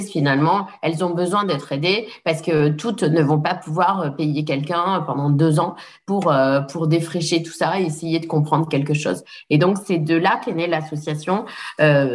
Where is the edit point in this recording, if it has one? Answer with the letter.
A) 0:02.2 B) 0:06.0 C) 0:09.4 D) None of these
D